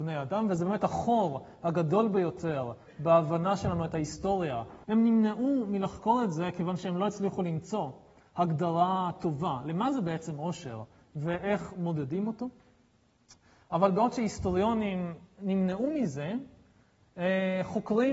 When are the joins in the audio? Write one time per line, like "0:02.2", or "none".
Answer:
0:04.8